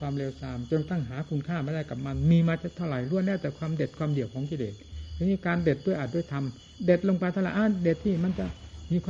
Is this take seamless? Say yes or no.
yes